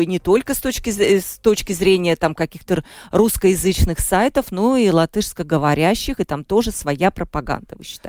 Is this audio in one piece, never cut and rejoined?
yes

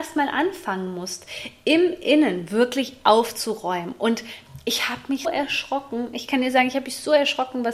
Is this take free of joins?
no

